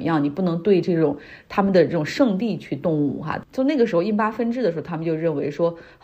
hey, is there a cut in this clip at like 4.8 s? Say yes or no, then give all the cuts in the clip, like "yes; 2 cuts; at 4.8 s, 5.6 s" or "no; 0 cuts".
no; 1 cut; at 3.4 s